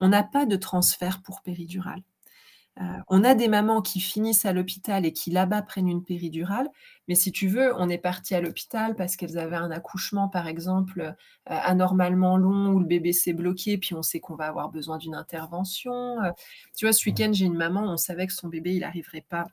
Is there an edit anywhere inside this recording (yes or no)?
no